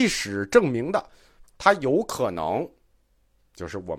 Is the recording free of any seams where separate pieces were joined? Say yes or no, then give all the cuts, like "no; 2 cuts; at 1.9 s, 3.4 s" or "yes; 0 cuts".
no; 1 cut; at 1.4 s